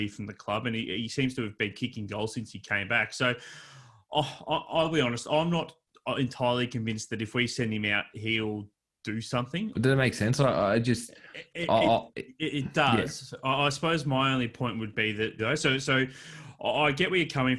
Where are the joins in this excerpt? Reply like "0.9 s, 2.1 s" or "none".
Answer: 9.7 s, 15.4 s